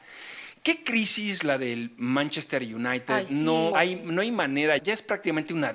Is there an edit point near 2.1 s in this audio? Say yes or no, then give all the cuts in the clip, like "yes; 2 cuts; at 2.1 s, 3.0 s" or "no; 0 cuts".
no; 2 cuts; at 3.7 s, 4.8 s